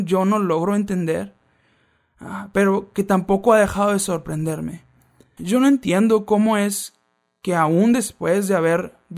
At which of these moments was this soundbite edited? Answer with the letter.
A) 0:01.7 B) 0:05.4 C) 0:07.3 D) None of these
B